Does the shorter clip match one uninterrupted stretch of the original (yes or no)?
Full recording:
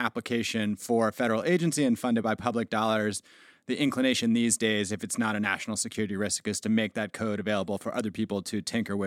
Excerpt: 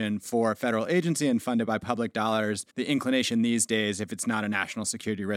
no